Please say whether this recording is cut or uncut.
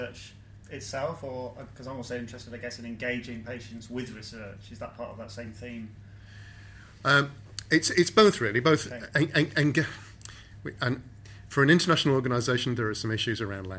uncut